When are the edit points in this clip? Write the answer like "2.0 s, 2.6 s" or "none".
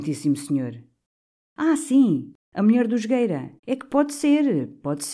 3.6 s